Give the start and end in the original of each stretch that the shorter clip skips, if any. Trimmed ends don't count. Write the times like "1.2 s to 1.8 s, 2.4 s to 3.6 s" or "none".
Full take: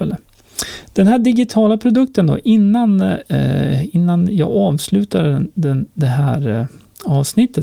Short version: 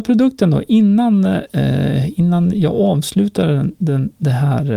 none